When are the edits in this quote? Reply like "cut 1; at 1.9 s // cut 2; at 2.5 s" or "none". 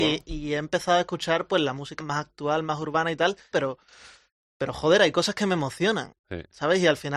cut 1; at 2.0 s // cut 2; at 3.5 s